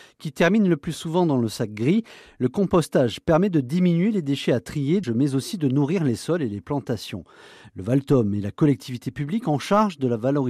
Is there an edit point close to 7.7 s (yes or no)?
no